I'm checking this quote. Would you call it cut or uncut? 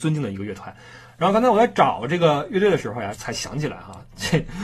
cut